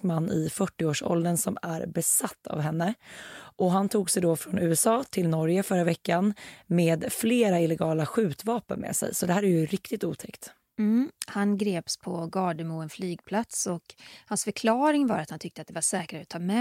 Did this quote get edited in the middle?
no; 0 cuts

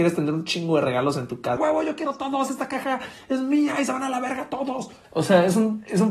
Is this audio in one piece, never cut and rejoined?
no; 2 cuts; at 1.6 s, 5.0 s

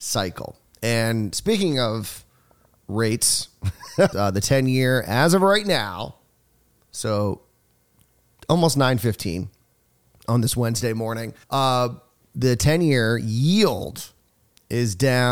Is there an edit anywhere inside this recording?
yes; 2 cuts; at 4.1 s, 11.4 s

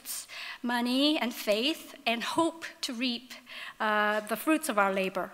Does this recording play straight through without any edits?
yes; 0 cuts

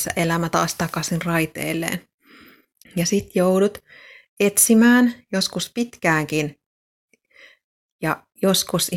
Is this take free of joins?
no; 1 cut; at 2.8 s

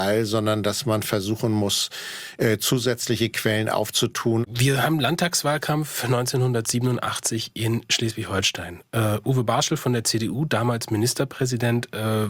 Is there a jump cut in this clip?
yes; 1 cut; at 4.4 s

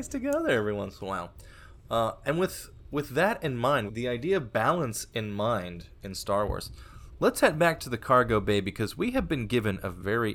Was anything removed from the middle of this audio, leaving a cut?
yes; 1 cut; at 3.9 s

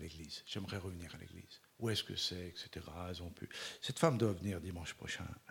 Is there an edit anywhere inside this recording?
yes; 1 cut; at 1.7 s

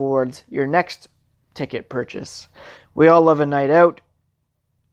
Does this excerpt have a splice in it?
yes; 1 cut; at 2.8 s

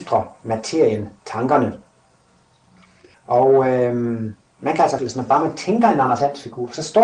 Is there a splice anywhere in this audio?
yes; 2 cuts; at 3.1 s, 5.0 s

